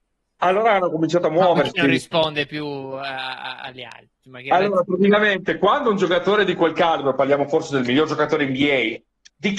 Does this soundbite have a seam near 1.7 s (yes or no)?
no